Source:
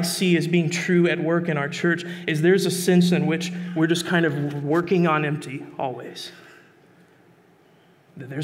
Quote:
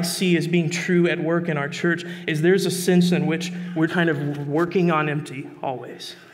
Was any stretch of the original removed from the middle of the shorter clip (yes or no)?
yes